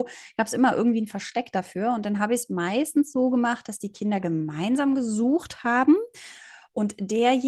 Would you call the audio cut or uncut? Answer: uncut